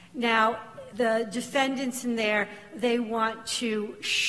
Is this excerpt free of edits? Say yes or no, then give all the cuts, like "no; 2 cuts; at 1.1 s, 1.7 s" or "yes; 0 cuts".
no; 1 cut; at 0.9 s